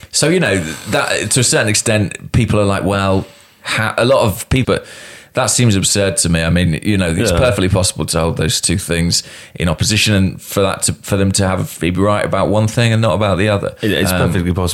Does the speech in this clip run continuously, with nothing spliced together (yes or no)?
no